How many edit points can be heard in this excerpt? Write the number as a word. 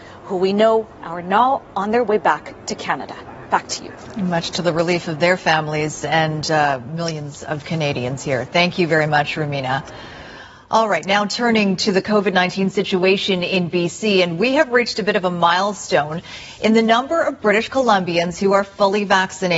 zero